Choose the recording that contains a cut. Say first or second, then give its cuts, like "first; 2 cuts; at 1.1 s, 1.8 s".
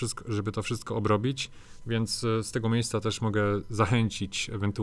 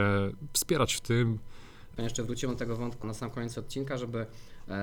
second; 2 cuts; at 2.0 s, 3.0 s